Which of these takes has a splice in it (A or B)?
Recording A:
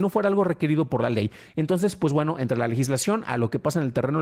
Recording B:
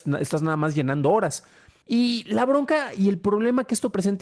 B